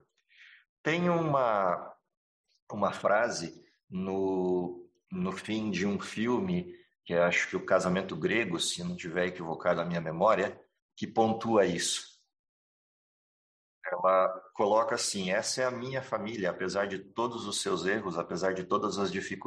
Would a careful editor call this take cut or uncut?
uncut